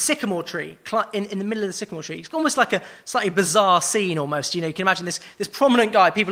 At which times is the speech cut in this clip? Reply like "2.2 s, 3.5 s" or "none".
none